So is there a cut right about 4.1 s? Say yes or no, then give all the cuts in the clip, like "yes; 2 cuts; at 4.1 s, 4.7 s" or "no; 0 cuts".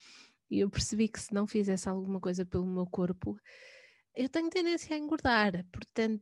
yes; 1 cut; at 4.1 s